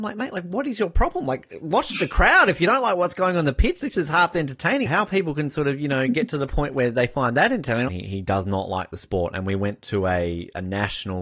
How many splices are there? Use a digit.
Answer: 2